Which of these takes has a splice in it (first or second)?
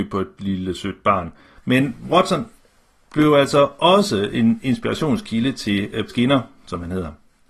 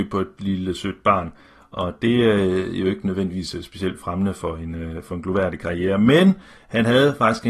first